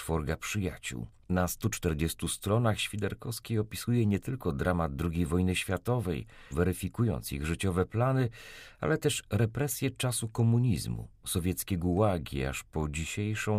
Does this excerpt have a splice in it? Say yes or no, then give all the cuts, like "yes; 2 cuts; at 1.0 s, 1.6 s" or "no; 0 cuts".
yes; 1 cut; at 6.5 s